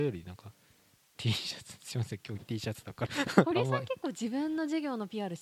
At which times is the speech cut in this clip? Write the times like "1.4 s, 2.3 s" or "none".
3.1 s

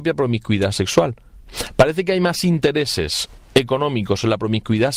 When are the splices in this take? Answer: none

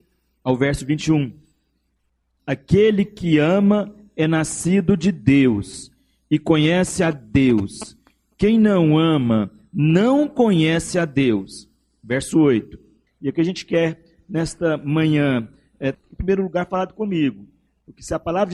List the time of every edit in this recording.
2.4 s, 13.1 s, 15.9 s

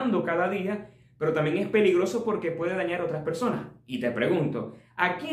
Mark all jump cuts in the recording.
none

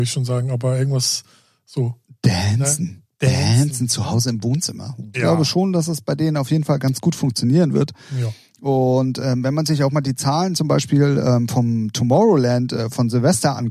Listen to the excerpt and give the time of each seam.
5.1 s

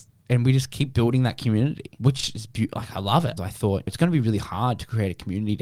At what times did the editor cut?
3.4 s

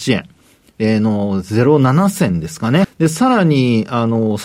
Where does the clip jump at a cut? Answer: 2.8 s

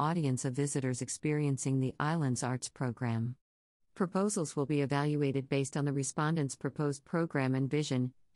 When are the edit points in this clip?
3.8 s

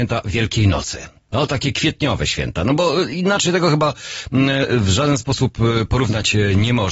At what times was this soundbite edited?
none

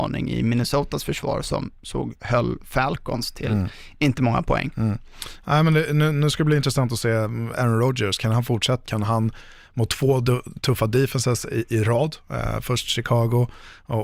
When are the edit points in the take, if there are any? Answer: 8.8 s

